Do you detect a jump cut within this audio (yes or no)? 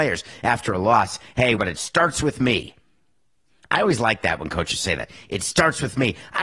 yes